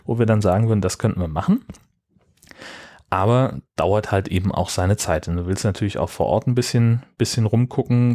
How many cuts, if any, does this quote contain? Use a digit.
0